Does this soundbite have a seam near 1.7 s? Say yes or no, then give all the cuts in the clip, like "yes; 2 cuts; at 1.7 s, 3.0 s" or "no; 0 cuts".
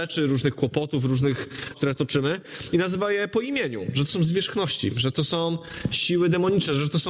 yes; 1 cut; at 1.7 s